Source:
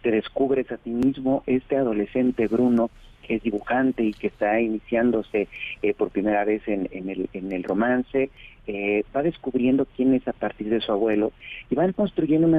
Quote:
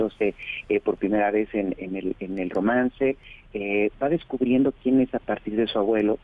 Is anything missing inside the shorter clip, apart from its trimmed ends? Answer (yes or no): no